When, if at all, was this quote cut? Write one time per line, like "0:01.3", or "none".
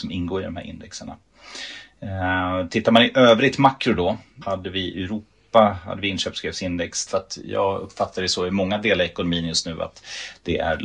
0:04.4
0:07.1